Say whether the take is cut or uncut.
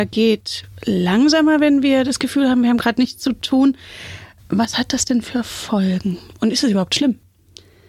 uncut